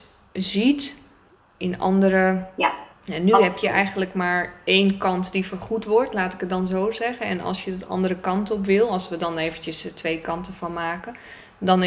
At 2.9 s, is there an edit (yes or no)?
yes